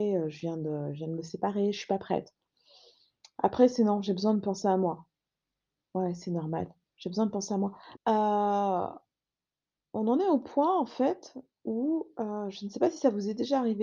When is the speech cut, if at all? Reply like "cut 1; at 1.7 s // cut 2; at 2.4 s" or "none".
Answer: cut 1; at 8.0 s